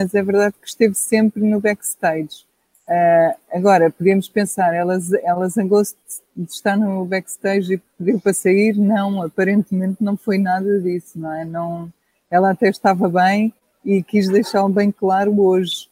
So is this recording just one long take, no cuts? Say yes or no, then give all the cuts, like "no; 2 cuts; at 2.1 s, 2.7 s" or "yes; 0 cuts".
yes; 0 cuts